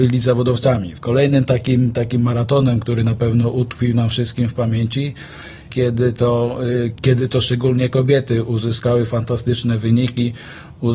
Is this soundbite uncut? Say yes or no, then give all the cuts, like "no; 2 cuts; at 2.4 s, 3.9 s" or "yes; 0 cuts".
no; 3 cuts; at 1.0 s, 5.7 s, 7.0 s